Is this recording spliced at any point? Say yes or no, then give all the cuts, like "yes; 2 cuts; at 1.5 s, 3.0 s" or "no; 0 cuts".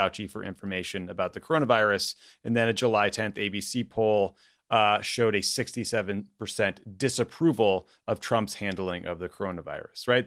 no; 0 cuts